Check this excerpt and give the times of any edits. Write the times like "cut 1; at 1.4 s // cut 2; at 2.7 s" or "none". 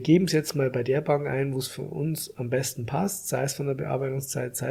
none